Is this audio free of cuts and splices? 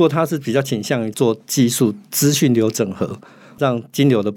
yes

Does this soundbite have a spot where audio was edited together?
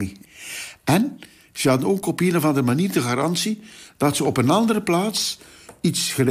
no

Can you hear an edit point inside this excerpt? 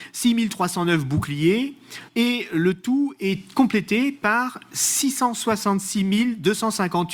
yes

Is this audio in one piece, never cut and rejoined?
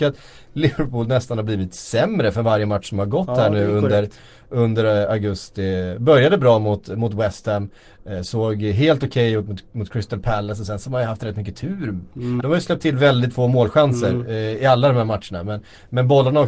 no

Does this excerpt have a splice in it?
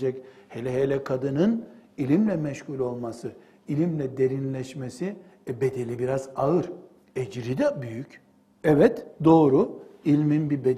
yes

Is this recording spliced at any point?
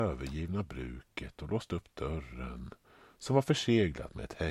no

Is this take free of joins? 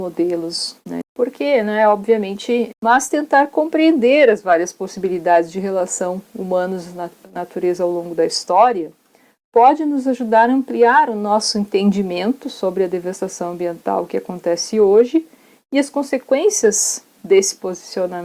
no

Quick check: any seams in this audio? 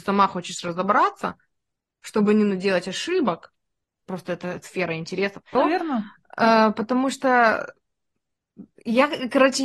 yes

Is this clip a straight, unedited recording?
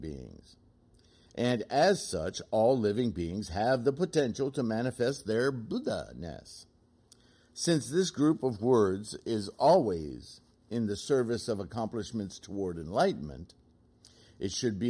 yes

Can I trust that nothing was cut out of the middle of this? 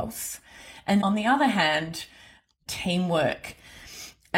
no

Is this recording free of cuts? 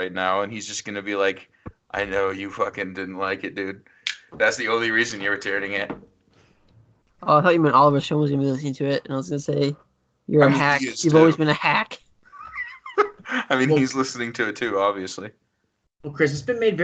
yes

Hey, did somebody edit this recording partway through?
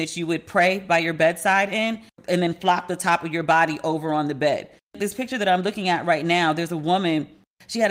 yes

